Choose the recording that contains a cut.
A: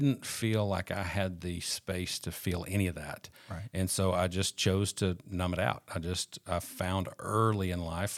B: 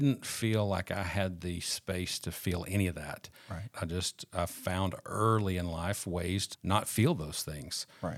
B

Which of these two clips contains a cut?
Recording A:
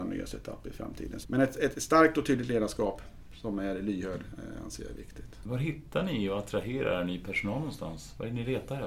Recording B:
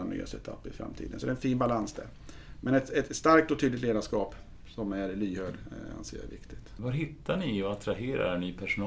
A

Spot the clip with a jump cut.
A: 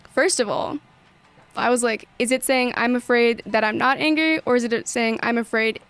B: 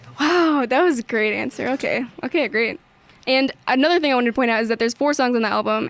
A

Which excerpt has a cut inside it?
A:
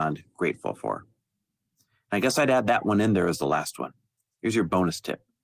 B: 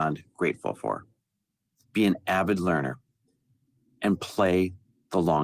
B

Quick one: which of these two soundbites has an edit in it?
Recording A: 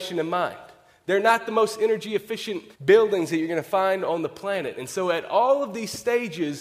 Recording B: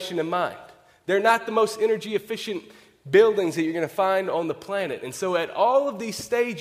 A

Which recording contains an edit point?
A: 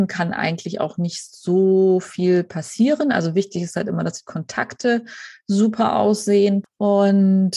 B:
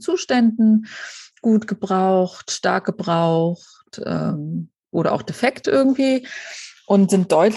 A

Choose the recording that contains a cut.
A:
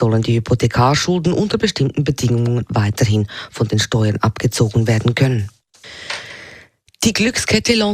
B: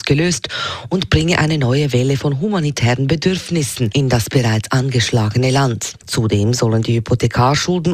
B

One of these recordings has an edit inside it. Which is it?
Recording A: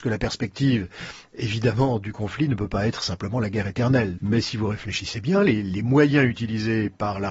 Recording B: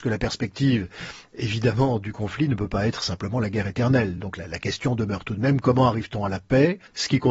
A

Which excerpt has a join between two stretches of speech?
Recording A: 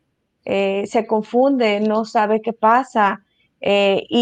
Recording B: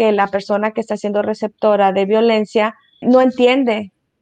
B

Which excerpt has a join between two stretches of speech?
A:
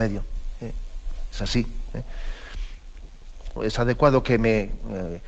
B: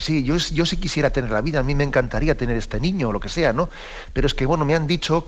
A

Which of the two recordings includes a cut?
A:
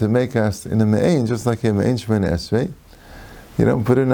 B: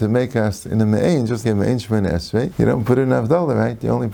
B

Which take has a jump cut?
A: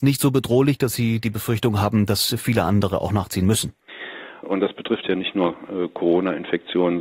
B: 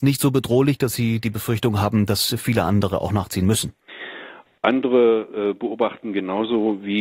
A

